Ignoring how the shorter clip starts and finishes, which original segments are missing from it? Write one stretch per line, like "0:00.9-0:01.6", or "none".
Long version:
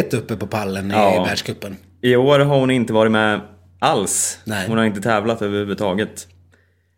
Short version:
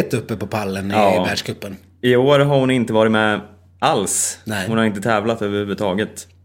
none